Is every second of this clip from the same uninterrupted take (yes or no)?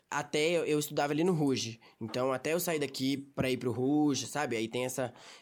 yes